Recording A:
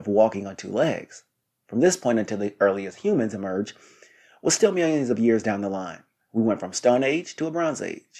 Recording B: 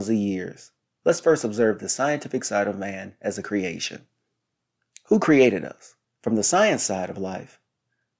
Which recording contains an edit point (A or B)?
B